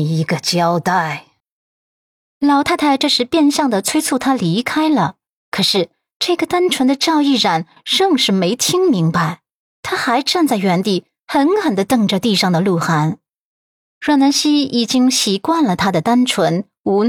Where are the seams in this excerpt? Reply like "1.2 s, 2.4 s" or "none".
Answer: none